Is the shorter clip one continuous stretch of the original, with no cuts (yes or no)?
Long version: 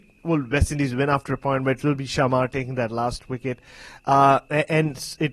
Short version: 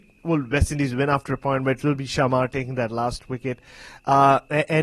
yes